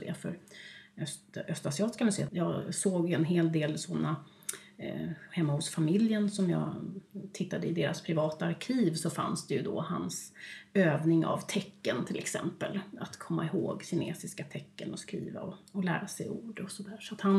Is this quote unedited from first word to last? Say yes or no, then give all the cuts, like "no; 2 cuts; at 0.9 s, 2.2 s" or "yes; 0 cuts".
no; 1 cut; at 2.3 s